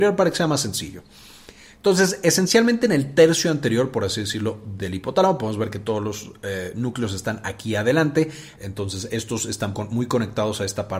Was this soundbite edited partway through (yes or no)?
yes